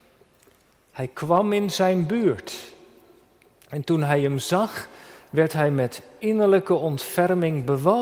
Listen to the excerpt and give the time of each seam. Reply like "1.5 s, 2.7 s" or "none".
none